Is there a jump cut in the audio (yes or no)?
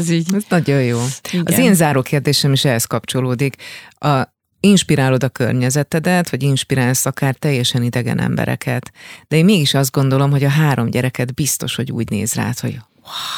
no